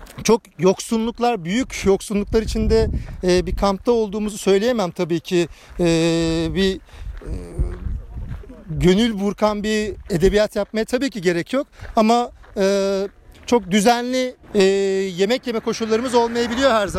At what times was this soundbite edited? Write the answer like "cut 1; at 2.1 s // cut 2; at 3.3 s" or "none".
cut 1; at 14.4 s